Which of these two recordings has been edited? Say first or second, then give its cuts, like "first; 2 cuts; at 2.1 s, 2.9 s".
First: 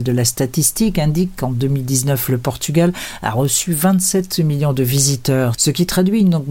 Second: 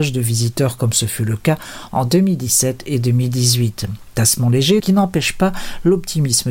second; 1 cut; at 4.8 s